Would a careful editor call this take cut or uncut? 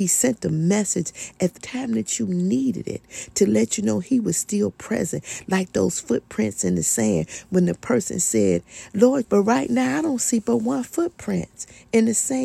cut